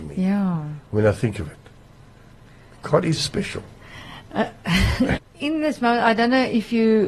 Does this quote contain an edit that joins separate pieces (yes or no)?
yes